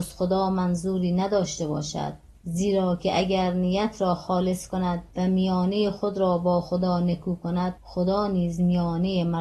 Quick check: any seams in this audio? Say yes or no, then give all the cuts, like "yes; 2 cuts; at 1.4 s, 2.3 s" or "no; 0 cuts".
yes; 1 cut; at 5.1 s